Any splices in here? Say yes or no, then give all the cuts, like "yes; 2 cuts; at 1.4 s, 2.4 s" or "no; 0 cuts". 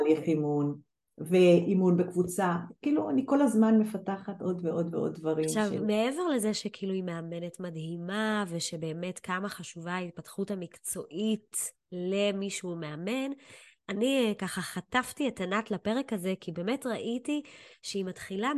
no; 0 cuts